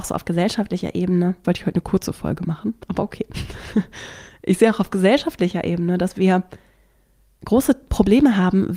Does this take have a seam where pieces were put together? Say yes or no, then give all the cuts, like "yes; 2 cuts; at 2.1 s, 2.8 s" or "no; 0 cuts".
yes; 1 cut; at 1.4 s